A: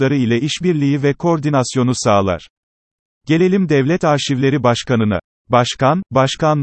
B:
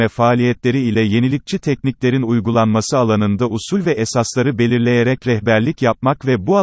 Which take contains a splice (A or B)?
A